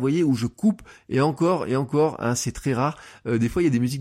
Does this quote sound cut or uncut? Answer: uncut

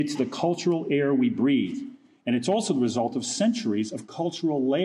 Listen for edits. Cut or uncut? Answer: uncut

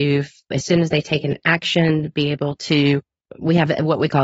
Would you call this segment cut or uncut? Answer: uncut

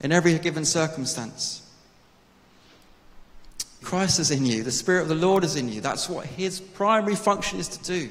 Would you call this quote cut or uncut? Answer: cut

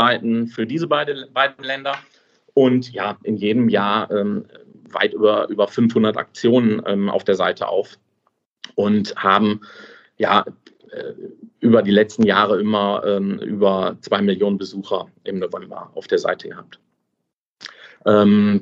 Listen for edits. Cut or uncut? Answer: cut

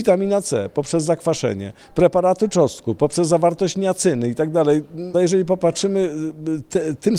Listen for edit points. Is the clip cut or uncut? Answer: cut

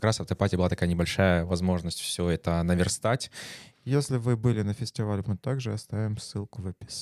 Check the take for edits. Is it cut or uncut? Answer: cut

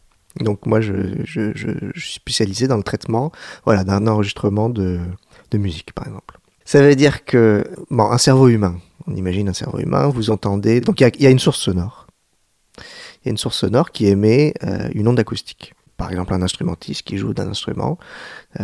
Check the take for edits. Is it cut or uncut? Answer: uncut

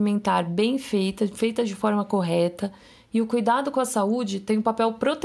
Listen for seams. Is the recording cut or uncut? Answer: uncut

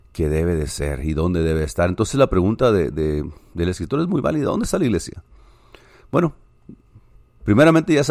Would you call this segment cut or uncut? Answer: uncut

